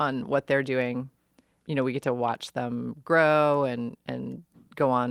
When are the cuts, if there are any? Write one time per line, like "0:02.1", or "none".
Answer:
0:01.6